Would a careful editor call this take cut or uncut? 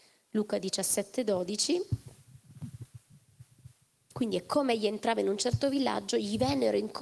uncut